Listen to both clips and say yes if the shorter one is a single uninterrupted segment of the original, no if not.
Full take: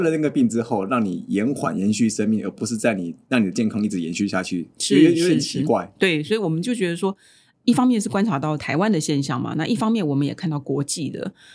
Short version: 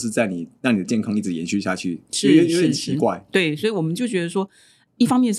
yes